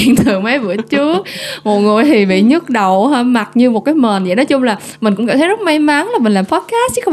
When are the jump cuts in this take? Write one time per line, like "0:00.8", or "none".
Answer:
none